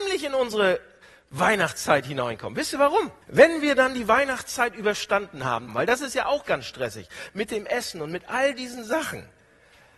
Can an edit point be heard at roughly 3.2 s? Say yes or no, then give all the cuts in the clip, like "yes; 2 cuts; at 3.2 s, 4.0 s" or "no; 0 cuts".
yes; 2 cuts; at 3.2 s, 5.7 s